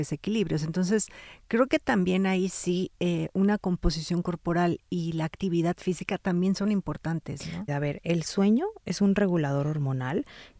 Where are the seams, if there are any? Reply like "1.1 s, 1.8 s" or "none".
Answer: 7.7 s